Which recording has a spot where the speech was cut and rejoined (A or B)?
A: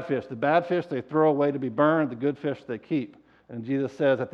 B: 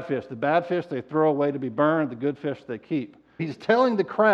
B